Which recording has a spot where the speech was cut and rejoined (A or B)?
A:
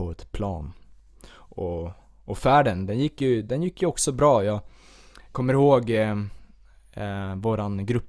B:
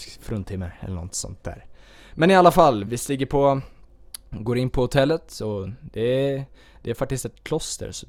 B